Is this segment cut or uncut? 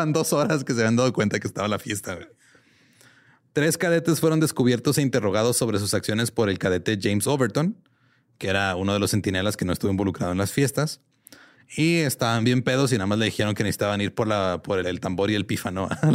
cut